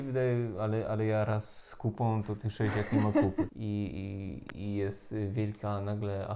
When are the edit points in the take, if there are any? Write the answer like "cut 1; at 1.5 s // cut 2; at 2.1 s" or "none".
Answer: cut 1; at 3.5 s